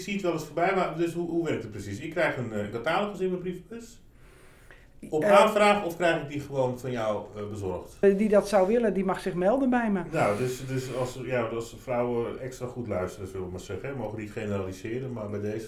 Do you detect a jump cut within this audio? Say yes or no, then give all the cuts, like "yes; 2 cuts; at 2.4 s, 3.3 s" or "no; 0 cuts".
yes; 1 cut; at 8.0 s